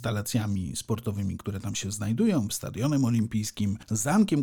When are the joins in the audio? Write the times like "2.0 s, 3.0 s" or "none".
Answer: 2.5 s